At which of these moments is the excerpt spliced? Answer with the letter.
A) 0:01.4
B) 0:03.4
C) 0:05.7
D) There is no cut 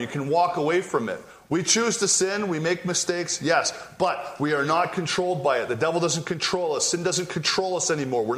D